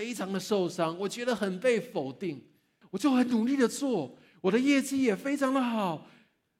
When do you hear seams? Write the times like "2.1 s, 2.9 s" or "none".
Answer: 2.8 s